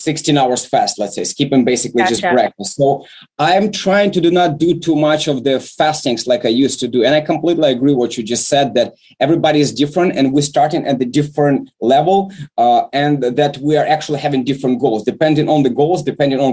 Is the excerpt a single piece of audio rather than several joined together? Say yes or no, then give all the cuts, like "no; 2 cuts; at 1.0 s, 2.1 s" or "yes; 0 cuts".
yes; 0 cuts